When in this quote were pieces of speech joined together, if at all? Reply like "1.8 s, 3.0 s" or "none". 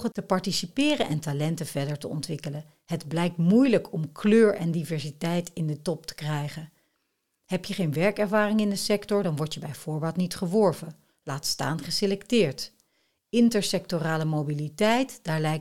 none